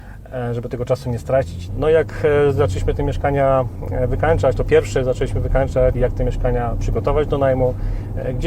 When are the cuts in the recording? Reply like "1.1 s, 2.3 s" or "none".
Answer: 1.7 s, 5.9 s